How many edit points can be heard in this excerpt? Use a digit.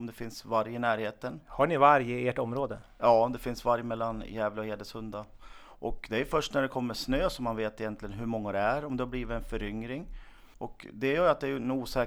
1